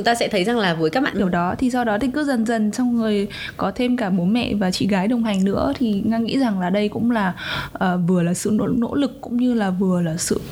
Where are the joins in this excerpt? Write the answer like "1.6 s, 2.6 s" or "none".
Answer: 1.1 s